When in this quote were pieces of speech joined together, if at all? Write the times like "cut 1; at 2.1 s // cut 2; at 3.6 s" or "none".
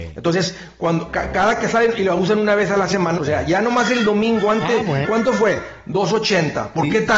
cut 1; at 3.2 s // cut 2; at 5.0 s